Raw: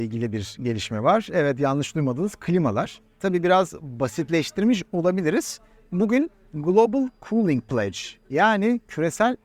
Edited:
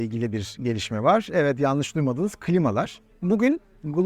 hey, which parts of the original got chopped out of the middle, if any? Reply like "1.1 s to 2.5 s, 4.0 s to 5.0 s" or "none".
3.1 s to 5.8 s